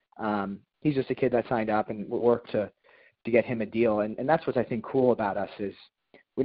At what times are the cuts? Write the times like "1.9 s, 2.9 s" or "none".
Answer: 2.2 s